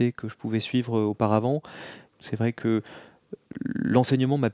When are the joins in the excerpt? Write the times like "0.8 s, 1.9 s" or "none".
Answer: 2.1 s